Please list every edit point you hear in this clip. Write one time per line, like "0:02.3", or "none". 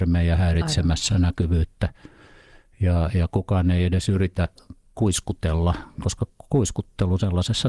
none